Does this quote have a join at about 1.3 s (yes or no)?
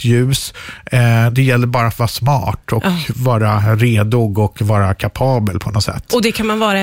no